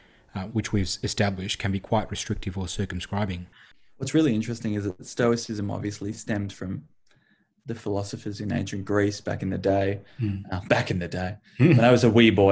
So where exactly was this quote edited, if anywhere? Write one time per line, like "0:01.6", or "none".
none